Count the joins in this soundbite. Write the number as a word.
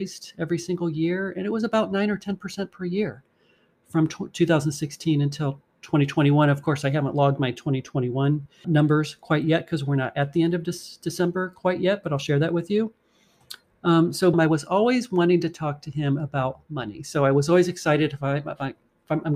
two